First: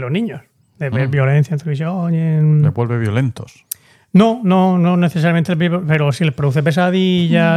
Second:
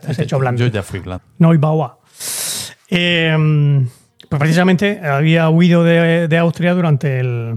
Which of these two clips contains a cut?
second; 1 cut; at 1.2 s

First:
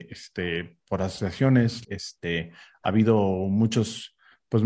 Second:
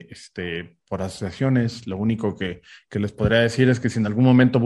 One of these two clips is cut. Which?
first; 1 cut; at 1.8 s

